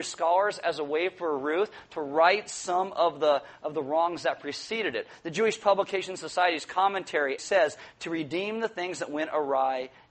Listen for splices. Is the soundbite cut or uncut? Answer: cut